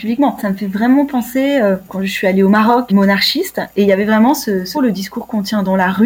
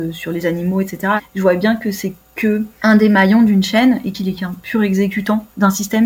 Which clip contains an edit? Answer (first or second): first